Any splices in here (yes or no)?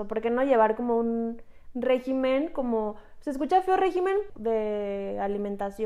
yes